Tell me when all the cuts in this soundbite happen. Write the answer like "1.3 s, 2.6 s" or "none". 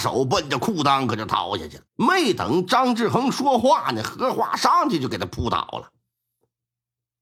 1.9 s

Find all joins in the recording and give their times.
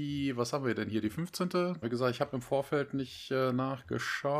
1.8 s

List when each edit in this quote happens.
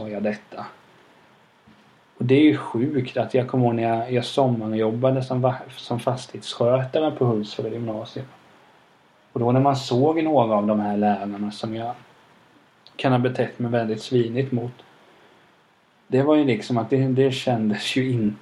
none

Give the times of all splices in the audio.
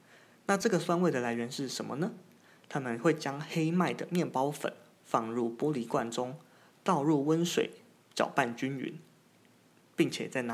none

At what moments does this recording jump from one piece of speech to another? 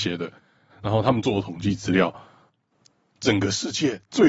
none

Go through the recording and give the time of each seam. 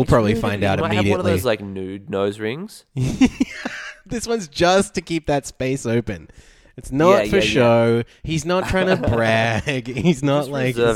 none

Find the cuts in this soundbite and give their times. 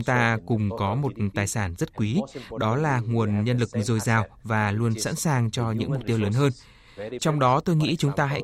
7.2 s

